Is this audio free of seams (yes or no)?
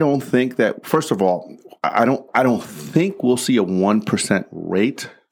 yes